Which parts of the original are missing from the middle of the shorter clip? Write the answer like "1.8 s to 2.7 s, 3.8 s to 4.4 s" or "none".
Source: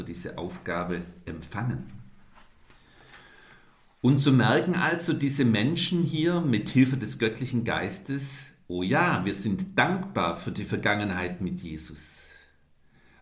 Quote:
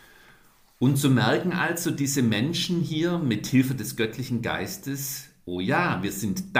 none